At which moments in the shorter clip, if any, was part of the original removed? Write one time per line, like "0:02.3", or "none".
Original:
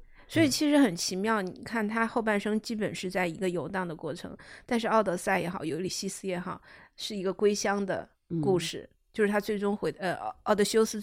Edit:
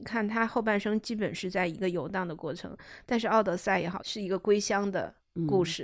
0:04.0